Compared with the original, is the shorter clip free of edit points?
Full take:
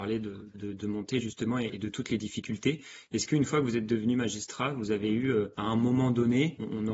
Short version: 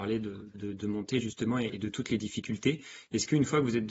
yes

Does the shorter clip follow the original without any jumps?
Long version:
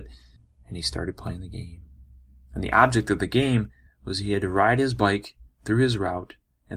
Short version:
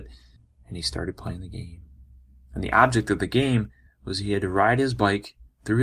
yes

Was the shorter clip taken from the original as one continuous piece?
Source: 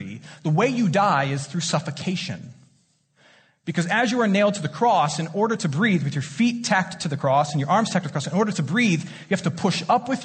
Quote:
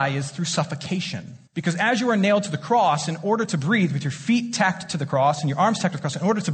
no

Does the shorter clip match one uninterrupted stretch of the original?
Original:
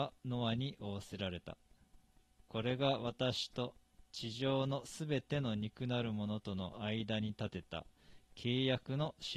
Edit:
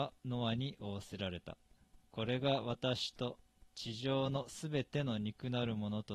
no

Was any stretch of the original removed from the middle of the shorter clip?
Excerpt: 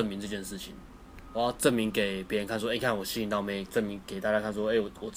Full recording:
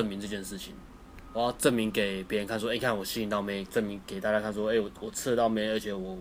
no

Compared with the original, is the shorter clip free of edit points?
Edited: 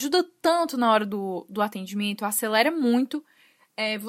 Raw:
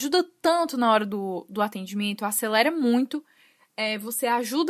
yes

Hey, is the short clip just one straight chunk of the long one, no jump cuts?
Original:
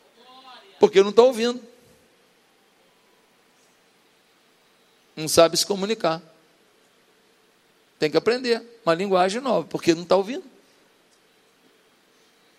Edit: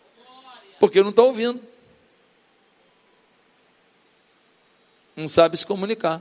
yes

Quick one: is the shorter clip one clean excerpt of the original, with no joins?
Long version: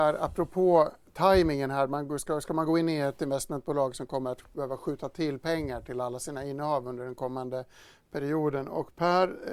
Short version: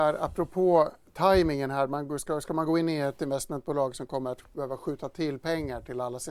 yes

